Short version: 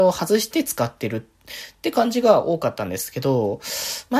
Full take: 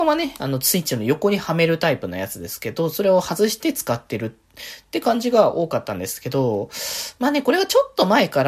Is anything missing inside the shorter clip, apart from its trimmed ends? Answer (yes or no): no